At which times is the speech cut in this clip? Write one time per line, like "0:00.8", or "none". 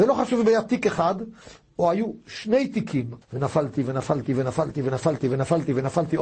0:03.2